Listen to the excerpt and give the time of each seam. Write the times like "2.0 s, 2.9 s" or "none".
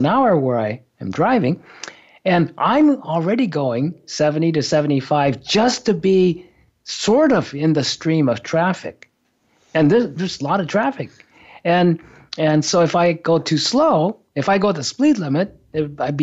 none